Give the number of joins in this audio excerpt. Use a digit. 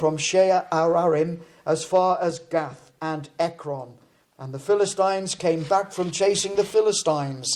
0